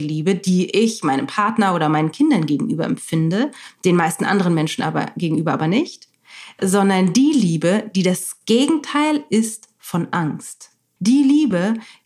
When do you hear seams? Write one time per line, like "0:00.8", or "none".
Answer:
0:11.0